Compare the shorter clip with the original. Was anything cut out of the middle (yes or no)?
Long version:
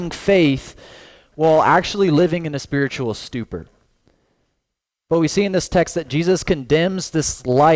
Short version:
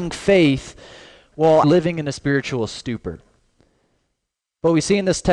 yes